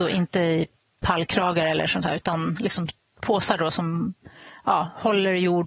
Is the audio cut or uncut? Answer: uncut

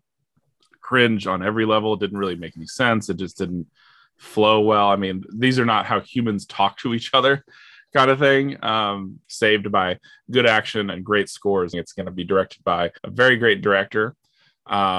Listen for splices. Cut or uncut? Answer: cut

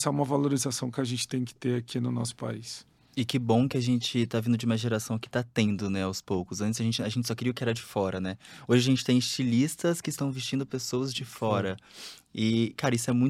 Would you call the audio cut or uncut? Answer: uncut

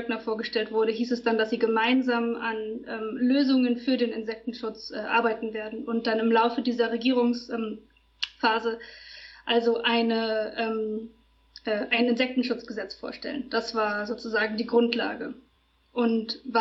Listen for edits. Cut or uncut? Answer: uncut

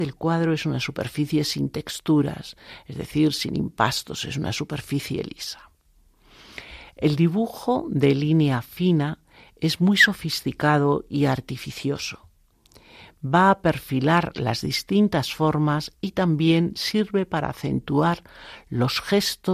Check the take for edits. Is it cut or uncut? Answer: uncut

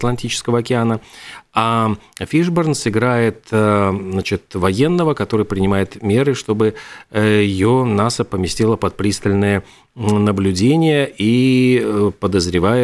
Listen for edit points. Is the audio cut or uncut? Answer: uncut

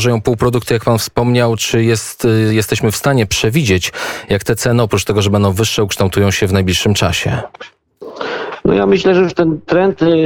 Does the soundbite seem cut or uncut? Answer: uncut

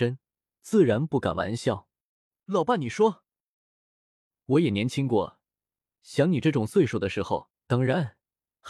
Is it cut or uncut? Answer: cut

